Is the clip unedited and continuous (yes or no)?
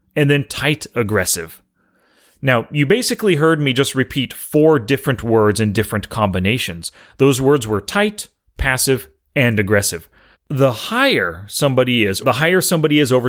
no